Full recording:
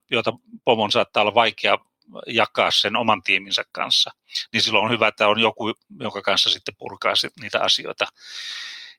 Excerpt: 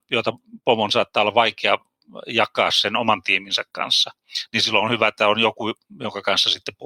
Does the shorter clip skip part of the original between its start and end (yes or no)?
no